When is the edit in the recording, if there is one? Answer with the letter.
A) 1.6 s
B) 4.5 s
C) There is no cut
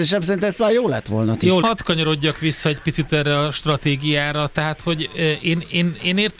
A